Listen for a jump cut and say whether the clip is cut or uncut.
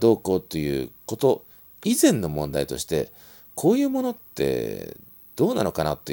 uncut